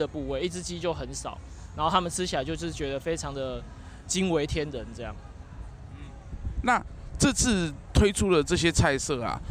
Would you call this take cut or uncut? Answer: uncut